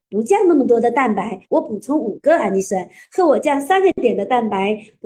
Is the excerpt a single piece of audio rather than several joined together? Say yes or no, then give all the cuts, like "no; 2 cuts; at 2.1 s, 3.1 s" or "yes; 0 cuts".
no; 1 cut; at 1.4 s